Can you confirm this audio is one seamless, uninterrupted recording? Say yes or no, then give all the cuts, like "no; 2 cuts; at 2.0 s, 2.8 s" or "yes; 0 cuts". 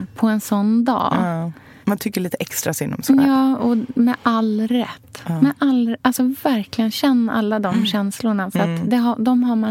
yes; 0 cuts